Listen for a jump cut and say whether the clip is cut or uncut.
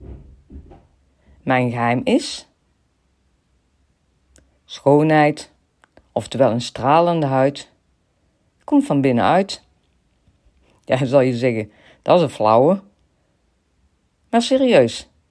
uncut